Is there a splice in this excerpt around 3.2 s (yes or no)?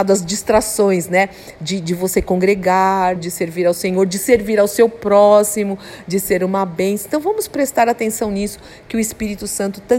yes